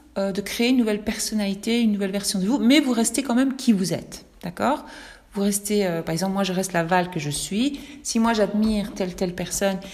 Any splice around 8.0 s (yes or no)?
no